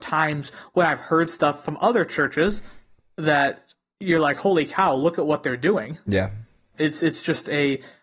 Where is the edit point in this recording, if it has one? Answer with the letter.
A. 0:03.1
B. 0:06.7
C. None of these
B